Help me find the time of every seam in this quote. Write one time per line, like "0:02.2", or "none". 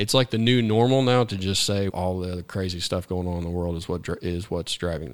0:01.9